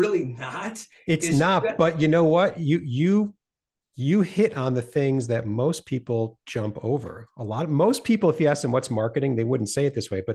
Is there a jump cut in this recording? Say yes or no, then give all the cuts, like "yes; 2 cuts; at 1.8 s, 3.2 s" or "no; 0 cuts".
no; 0 cuts